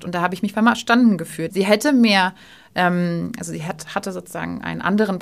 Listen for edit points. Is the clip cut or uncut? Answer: cut